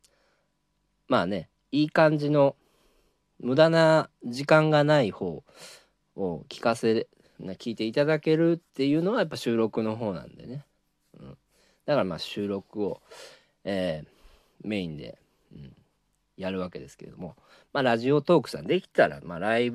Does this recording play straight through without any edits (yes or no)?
no